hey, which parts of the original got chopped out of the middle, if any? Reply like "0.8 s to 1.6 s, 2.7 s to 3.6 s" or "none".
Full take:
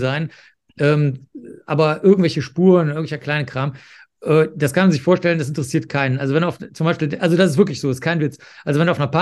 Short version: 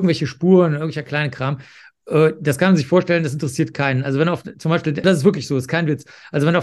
7.2 s to 7.4 s